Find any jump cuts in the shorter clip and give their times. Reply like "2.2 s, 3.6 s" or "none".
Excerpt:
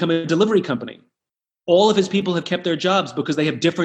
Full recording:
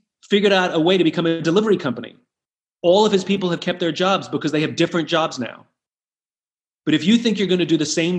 none